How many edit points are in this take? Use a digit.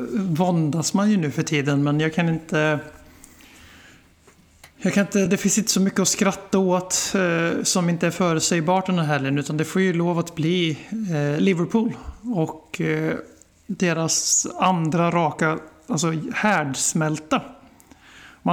0